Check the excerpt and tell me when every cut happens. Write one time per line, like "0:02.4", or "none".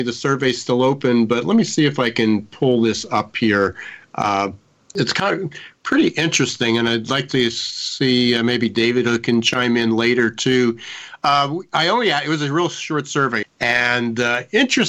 0:13.4